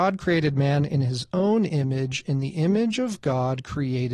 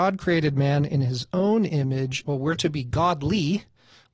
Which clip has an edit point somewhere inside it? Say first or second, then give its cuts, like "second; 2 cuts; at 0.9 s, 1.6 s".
second; 1 cut; at 2.2 s